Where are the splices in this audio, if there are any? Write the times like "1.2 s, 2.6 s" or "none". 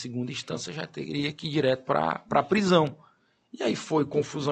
none